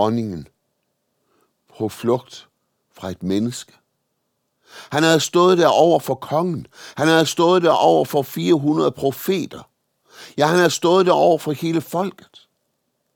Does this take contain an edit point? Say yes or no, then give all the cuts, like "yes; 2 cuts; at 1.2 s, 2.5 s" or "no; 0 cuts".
no; 0 cuts